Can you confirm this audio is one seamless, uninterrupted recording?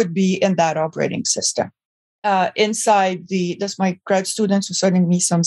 no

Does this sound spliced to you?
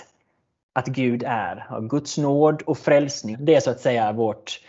yes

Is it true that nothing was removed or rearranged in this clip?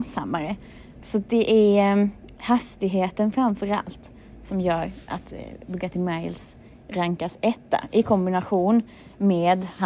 no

